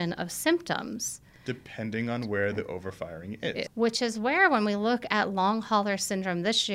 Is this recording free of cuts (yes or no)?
no